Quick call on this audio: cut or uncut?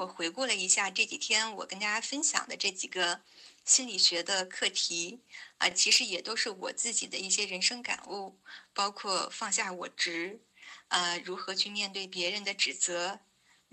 uncut